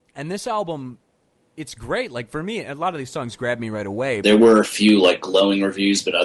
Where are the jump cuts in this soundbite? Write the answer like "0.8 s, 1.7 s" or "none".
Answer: 4.2 s